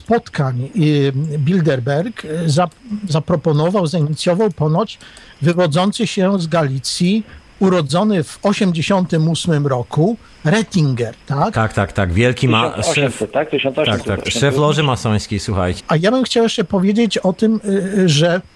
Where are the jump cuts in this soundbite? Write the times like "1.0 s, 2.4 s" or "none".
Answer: 14.2 s, 15.8 s